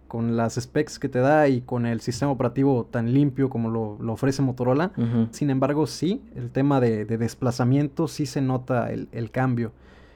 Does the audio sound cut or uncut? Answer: cut